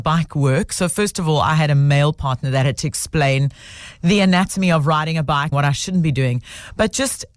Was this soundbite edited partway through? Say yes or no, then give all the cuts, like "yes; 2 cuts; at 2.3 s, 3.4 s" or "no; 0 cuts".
yes; 1 cut; at 5.5 s